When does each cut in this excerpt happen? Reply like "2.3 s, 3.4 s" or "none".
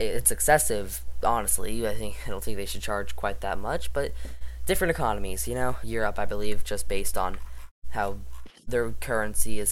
5.8 s